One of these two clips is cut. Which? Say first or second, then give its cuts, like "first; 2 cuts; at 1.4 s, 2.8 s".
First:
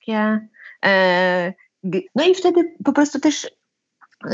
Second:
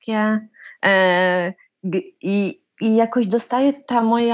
first; 1 cut; at 2.1 s